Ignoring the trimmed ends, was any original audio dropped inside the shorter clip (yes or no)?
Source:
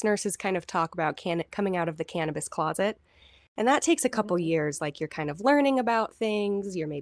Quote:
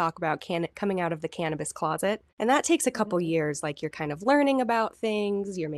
yes